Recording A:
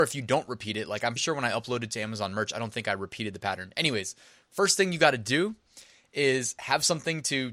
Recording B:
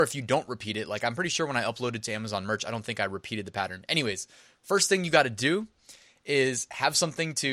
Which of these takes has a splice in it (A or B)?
A